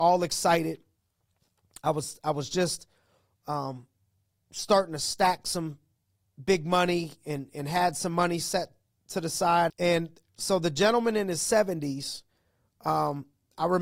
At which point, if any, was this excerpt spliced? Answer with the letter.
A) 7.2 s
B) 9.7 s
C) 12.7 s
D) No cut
B